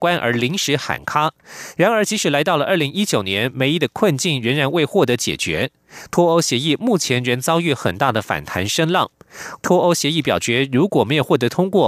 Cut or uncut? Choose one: cut